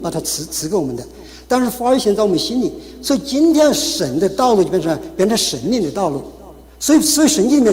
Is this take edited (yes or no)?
no